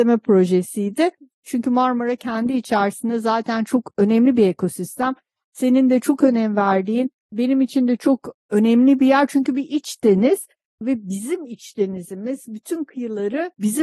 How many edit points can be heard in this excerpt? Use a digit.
1